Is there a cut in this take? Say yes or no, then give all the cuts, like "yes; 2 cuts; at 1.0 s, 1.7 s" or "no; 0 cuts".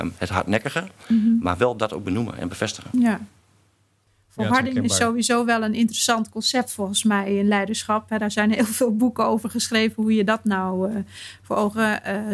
no; 0 cuts